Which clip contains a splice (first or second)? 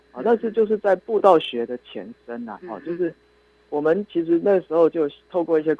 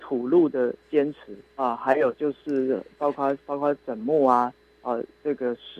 second